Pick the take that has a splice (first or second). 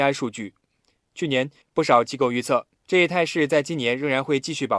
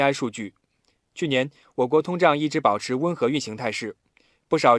first